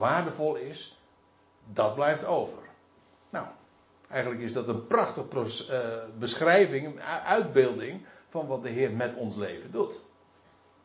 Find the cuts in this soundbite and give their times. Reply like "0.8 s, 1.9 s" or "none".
none